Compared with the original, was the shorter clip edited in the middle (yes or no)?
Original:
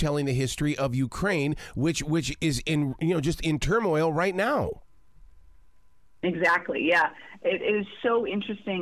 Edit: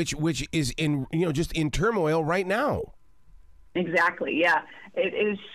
yes